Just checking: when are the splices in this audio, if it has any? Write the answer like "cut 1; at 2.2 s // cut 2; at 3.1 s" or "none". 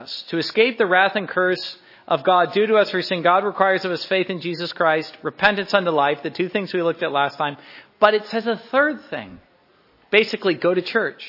none